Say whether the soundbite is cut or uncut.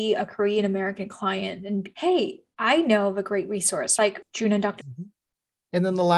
cut